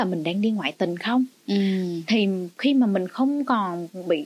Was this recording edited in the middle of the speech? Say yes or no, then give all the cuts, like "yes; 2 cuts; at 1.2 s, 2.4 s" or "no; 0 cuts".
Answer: no; 0 cuts